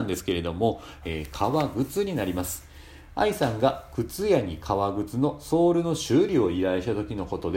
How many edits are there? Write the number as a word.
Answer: one